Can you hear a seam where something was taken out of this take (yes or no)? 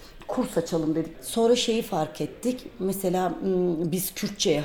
yes